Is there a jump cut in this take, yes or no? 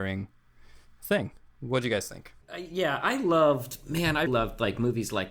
yes